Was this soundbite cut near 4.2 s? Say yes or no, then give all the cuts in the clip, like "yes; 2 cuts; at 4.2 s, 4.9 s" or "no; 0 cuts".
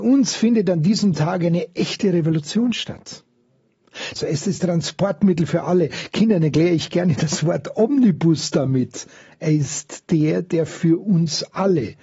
yes; 1 cut; at 4.2 s